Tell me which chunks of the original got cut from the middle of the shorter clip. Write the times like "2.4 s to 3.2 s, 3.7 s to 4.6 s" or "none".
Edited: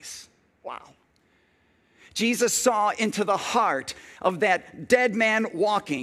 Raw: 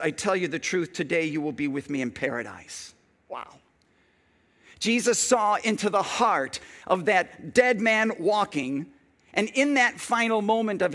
none